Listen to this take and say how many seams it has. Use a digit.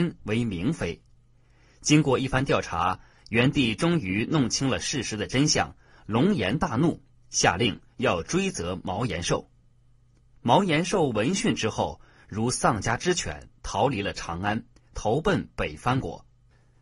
0